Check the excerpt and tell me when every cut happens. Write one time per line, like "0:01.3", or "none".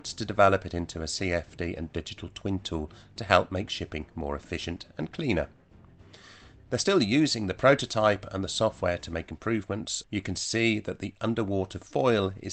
0:06.7
0:10.0